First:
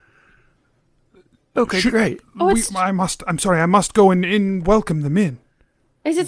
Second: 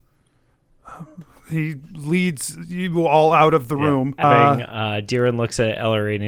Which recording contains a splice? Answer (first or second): second